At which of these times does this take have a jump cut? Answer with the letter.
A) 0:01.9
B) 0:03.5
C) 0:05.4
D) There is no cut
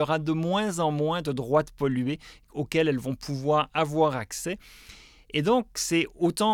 D